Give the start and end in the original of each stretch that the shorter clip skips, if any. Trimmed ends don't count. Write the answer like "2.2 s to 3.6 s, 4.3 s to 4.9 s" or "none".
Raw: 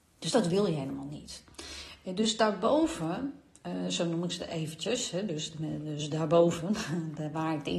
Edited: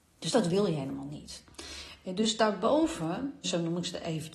3.4 s to 3.9 s